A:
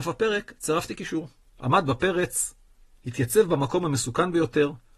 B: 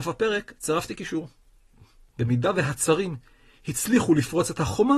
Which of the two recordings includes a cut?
A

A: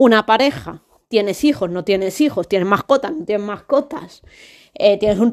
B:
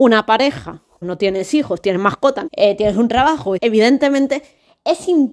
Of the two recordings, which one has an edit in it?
B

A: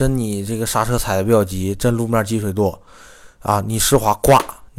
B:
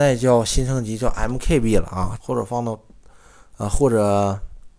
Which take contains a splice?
B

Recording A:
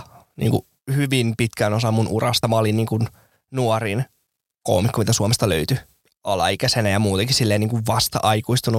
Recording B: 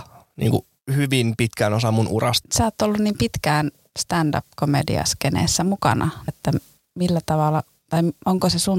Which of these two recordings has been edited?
B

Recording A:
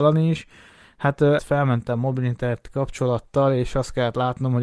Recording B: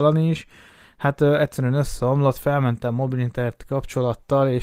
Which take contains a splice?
A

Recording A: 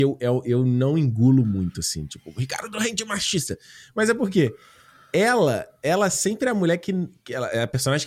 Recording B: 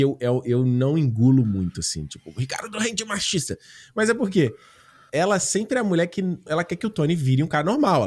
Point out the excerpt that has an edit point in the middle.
B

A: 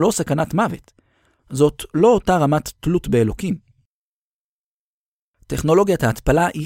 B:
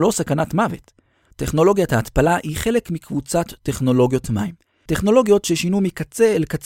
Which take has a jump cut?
B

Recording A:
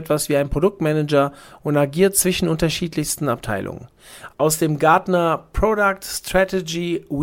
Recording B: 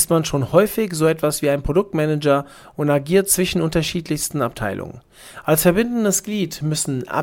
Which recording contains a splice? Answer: A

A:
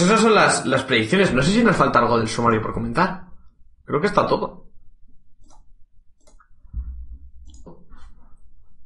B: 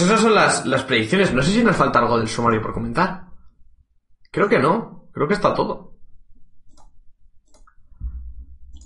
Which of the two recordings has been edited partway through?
A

